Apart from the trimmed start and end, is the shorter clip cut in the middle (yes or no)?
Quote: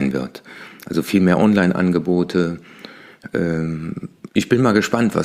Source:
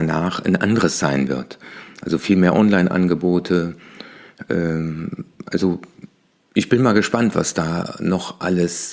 yes